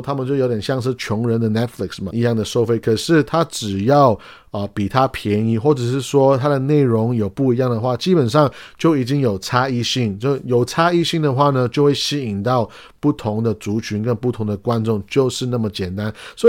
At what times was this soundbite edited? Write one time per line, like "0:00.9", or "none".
0:02.1